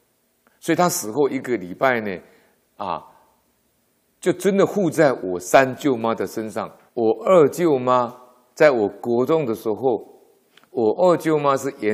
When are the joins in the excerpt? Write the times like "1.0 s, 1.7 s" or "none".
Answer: 6.9 s